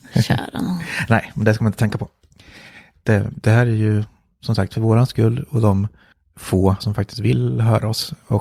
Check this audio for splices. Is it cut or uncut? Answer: cut